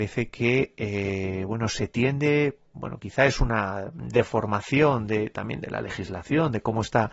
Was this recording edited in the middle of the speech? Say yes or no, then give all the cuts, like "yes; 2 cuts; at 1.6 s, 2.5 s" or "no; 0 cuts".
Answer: no; 0 cuts